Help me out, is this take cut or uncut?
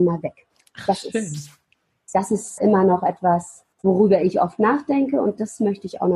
cut